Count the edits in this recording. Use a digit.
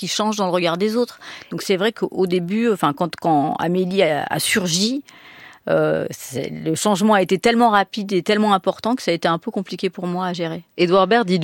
0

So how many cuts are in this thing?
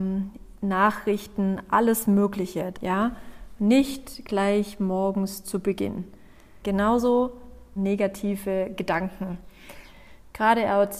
3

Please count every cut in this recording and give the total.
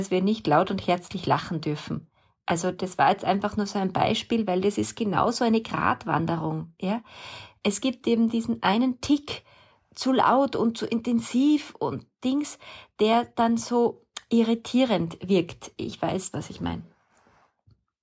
1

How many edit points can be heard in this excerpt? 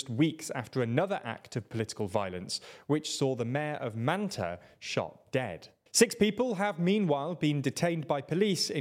1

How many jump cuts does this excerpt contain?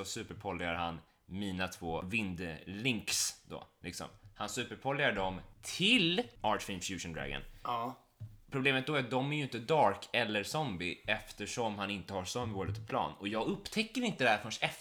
0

